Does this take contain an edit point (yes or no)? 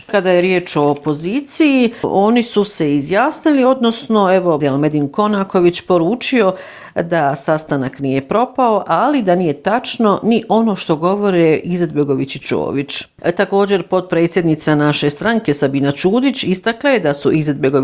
yes